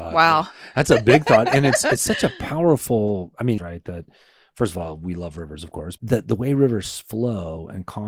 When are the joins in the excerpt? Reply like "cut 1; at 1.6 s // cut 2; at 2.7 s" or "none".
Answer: cut 1; at 3.6 s // cut 2; at 6.0 s